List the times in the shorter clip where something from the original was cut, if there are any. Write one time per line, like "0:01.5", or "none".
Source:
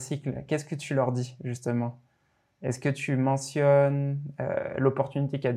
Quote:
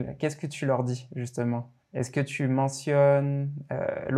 0:01.8